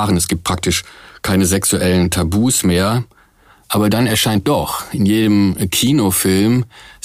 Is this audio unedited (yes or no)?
yes